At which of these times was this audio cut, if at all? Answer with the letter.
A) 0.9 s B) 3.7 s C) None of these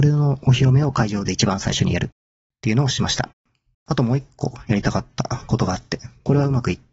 B